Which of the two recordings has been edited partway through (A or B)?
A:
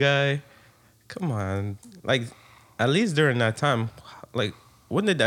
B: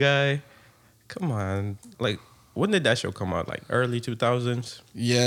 B